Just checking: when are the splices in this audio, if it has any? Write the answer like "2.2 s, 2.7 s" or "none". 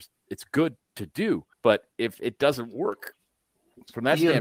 1.5 s